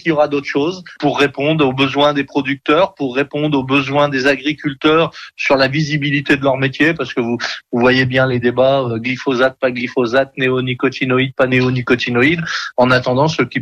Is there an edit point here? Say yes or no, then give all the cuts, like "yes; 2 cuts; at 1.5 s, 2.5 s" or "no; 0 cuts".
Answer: no; 0 cuts